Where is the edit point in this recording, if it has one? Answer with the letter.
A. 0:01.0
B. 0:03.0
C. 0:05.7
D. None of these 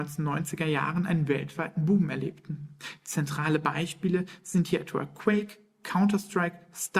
D